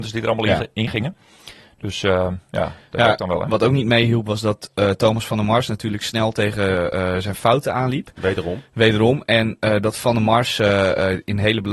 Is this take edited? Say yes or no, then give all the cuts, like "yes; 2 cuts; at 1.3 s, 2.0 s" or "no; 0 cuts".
no; 0 cuts